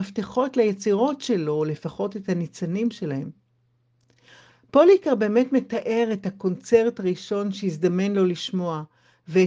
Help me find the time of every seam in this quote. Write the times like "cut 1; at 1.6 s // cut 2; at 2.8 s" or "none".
none